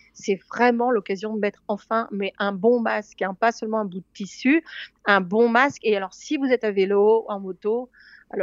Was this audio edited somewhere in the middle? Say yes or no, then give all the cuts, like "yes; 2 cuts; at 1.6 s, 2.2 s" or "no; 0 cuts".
no; 0 cuts